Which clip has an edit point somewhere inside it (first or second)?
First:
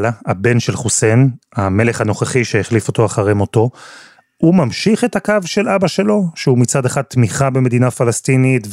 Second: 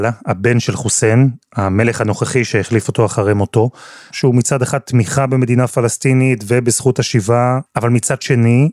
second